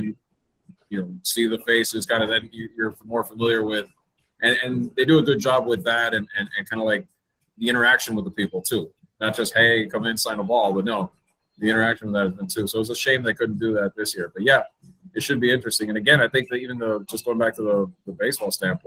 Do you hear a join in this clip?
no; 0 cuts

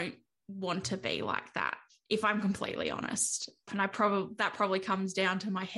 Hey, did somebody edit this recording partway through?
yes; 1 cut; at 3.7 s

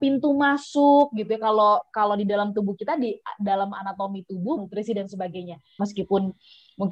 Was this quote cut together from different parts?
yes; 2 cuts; at 4.6 s, 5.8 s

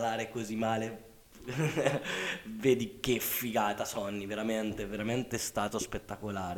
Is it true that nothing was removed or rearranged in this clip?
yes; 0 cuts

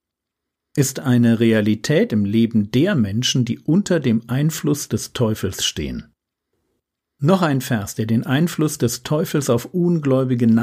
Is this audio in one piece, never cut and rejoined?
yes; 0 cuts

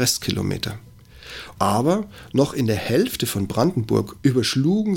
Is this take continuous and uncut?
no; 1 cut; at 1.6 s

